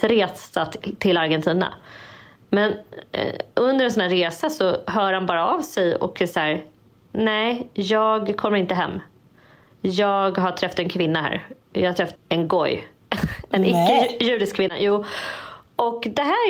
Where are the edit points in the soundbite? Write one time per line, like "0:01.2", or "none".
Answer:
0:12.1